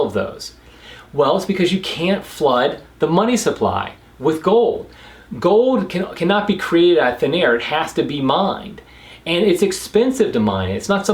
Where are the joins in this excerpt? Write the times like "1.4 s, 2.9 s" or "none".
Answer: none